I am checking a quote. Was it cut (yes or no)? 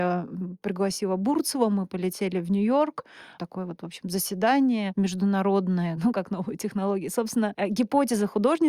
yes